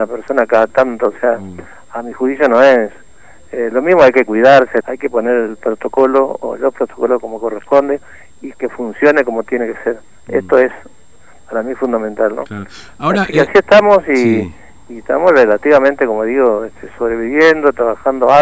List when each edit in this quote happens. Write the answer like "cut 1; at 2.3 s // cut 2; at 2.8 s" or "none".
cut 1; at 4.8 s